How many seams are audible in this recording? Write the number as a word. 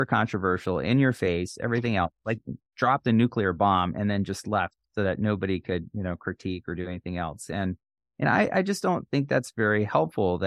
zero